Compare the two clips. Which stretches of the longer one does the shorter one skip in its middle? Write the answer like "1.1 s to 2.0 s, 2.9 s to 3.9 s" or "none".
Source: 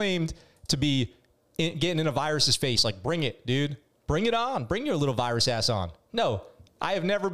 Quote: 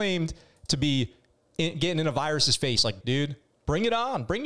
3.0 s to 3.4 s